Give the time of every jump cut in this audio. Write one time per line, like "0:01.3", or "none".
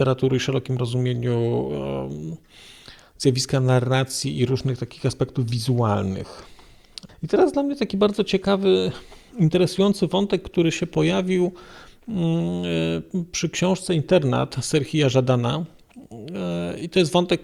0:07.1

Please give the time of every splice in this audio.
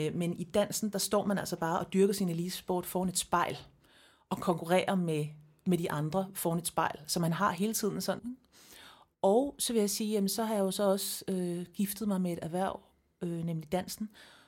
0:08.2
0:11.7

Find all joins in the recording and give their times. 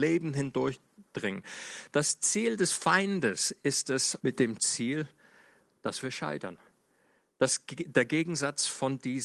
0:04.2

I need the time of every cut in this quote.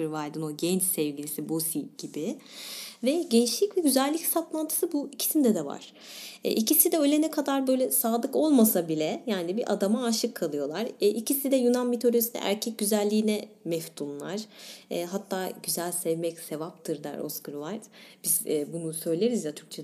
none

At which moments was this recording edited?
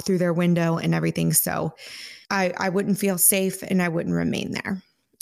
0:02.2

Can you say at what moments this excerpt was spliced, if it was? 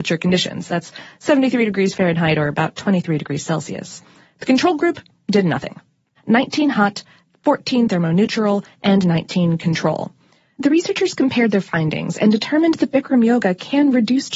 0:06.2

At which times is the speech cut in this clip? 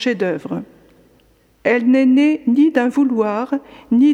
0:01.6

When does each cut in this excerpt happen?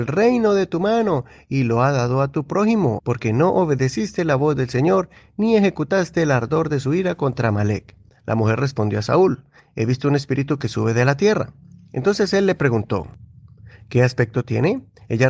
0:03.0
0:08.1

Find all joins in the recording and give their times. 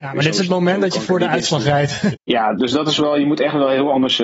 0:02.1

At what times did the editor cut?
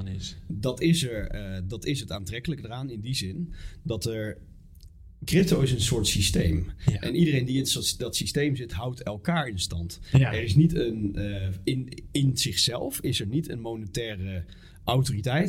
none

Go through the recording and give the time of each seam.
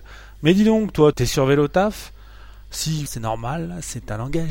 0:01.1
0:03.1

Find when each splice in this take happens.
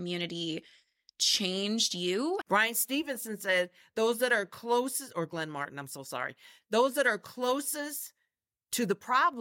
0:02.4

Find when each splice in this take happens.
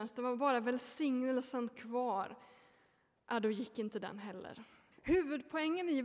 0:04.9

